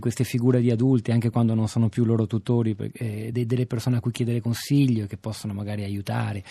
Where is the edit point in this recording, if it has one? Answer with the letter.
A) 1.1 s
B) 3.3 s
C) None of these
B